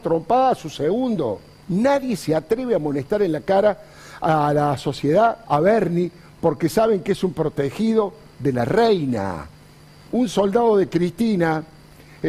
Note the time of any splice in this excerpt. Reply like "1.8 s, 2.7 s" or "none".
1.6 s, 5.4 s, 10.1 s